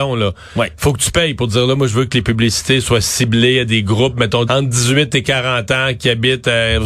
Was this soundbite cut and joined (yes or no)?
yes